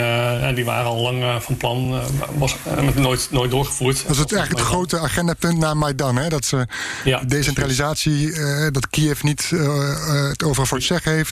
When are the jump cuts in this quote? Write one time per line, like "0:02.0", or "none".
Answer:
none

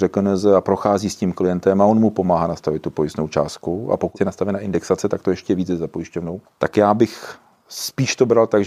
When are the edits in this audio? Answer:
none

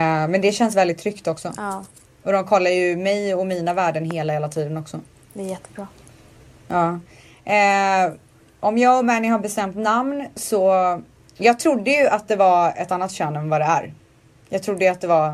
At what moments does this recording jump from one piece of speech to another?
none

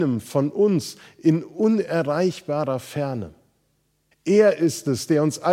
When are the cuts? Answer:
0:04.1

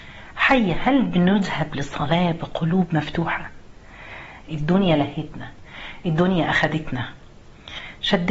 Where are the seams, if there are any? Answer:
0:04.4

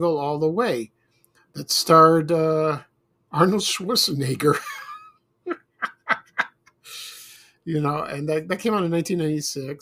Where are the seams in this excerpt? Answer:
none

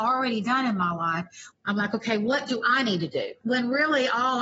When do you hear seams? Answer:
0:01.5
0:03.4

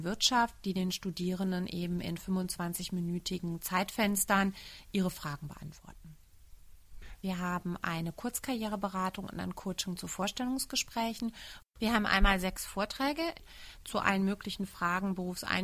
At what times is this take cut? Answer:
0:07.1
0:11.6

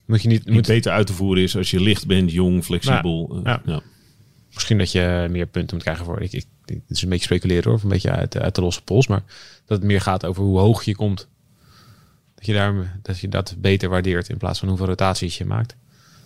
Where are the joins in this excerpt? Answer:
none

